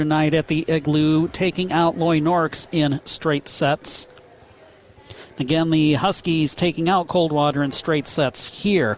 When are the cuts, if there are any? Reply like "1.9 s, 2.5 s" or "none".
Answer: none